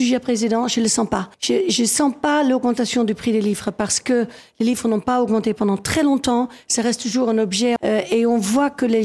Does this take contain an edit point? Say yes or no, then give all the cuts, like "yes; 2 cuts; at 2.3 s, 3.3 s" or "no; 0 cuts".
yes; 2 cuts; at 1.3 s, 7.8 s